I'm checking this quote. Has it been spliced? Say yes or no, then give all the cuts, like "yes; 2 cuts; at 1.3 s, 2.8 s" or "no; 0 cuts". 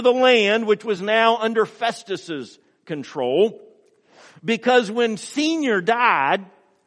no; 0 cuts